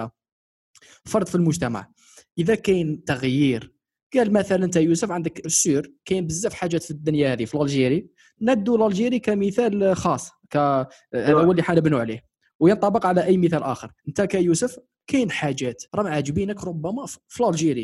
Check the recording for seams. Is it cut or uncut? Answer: cut